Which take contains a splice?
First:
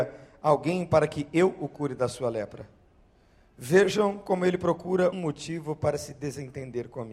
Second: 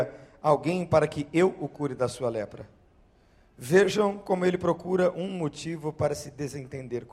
first; 1 cut; at 5.1 s

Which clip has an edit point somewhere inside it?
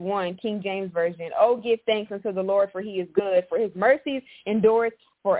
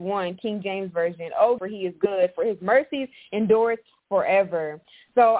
second; 1 cut; at 1.6 s

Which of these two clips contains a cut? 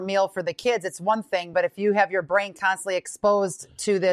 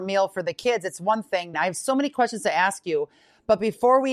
second; 1 cut; at 1.5 s

